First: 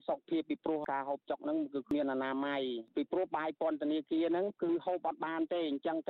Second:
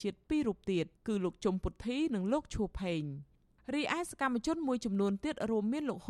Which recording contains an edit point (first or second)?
second